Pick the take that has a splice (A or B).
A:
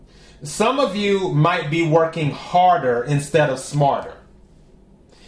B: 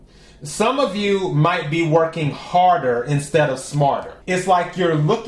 B